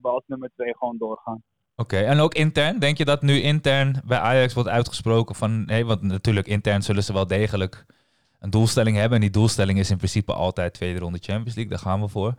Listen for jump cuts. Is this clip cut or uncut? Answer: uncut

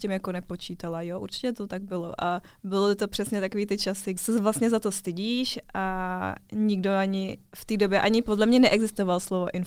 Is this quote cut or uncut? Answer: cut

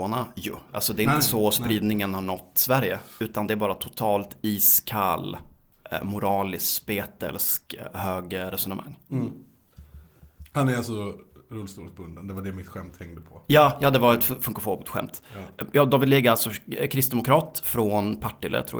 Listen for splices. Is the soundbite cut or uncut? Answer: uncut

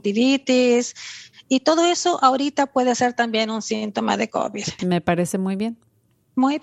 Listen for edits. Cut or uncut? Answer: cut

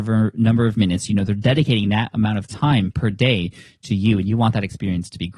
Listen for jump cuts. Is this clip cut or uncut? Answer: uncut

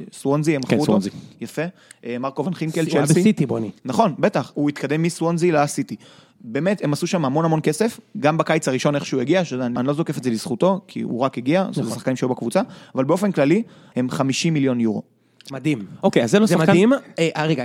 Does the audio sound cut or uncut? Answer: cut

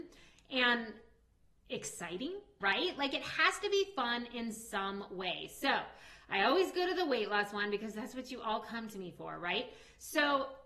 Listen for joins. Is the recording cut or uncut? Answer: cut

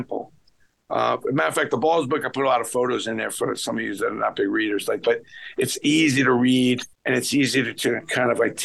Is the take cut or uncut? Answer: cut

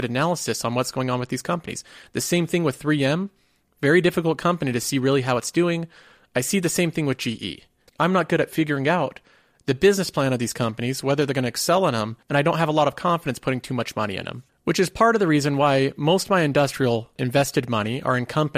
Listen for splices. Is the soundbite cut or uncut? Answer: cut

